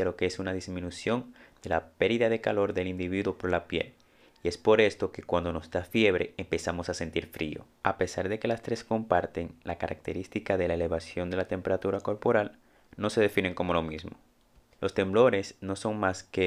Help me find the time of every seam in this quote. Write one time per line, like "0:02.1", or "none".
0:07.8
0:14.7